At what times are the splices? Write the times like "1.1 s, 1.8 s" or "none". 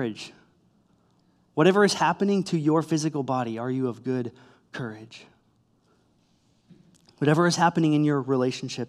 none